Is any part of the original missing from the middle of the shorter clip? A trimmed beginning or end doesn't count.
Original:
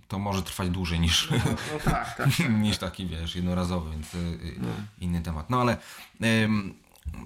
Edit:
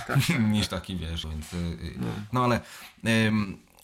yes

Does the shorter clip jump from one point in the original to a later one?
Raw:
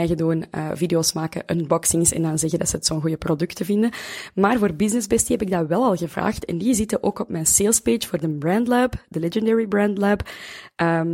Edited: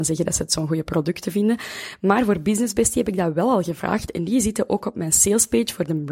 no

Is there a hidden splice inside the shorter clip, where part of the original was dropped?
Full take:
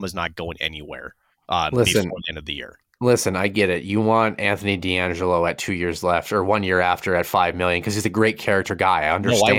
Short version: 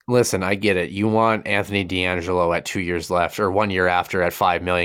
no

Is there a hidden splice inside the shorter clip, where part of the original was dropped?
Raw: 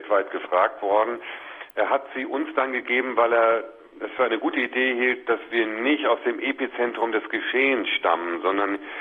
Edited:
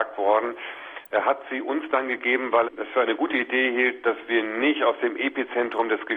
yes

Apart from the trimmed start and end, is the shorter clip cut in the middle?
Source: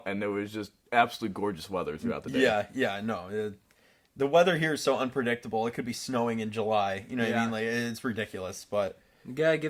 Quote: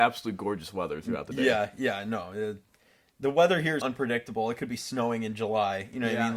yes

